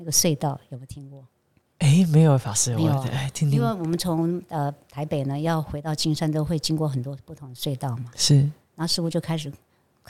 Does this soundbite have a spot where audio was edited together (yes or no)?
no